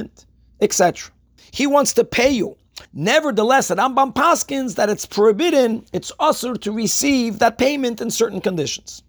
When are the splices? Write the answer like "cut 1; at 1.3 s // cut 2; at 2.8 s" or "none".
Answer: cut 1; at 1.4 s // cut 2; at 2.9 s